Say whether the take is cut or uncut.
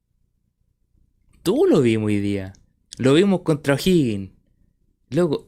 uncut